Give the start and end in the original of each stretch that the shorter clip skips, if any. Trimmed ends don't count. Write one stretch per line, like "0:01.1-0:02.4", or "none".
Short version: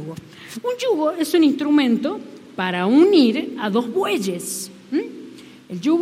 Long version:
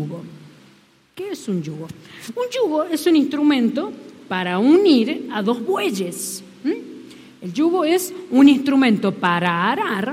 none

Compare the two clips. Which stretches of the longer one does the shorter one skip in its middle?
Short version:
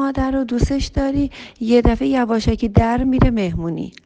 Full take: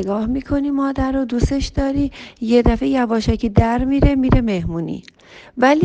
0:03.8-0:04.1

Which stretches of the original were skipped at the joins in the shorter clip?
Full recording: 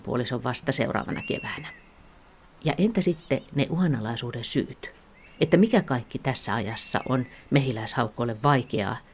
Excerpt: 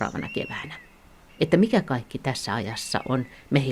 0:02.2-0:05.3

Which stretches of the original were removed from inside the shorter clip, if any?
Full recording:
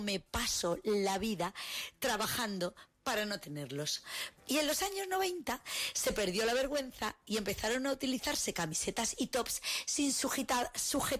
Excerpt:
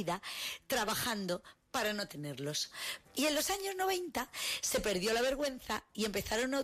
none

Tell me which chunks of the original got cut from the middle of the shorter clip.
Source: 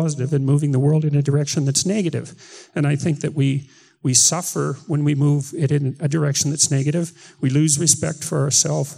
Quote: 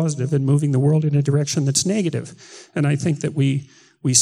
none

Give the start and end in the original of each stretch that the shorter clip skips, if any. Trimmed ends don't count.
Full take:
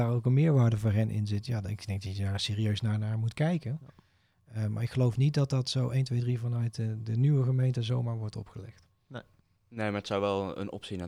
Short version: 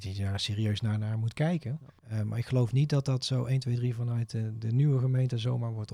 0:04.0-0:04.4

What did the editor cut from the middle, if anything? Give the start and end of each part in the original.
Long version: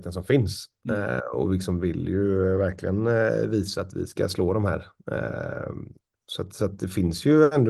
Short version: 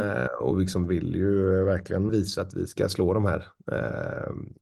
0:03.0-0:03.5

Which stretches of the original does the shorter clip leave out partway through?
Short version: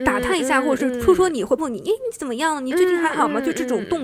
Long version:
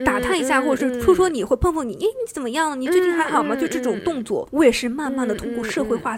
0:01.6-0:01.7

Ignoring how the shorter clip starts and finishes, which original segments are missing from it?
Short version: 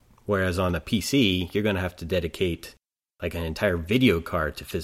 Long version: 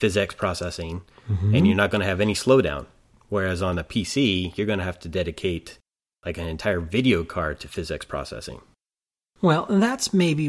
none

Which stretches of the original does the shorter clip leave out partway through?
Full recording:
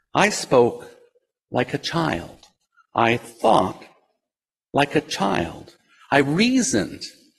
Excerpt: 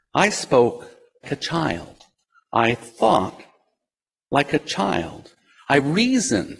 0:01.2-0:01.7

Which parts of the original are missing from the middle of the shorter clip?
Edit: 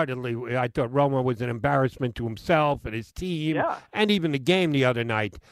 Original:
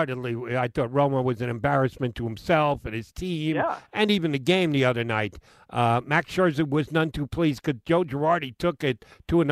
none

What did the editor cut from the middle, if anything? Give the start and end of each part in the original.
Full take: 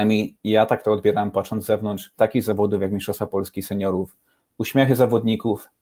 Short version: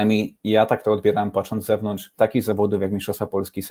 none

